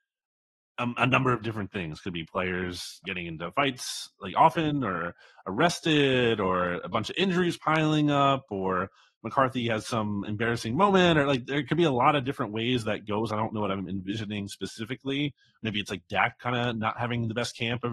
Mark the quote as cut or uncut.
cut